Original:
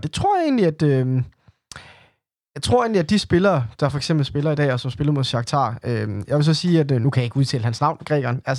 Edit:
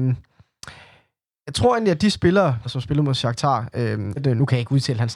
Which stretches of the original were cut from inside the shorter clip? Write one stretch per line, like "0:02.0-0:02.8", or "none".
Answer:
0:03.7-0:04.7
0:06.3-0:06.8